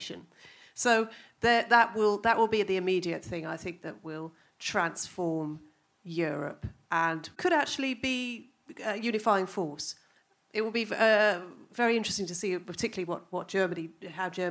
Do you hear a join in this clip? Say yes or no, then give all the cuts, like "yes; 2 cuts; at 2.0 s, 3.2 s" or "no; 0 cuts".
no; 0 cuts